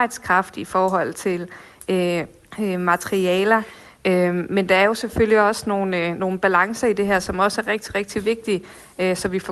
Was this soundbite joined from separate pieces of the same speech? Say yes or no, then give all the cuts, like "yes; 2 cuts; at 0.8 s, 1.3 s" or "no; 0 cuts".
yes; 1 cut; at 3.9 s